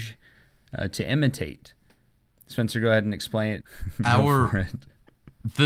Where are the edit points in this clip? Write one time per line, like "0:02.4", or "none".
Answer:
0:03.6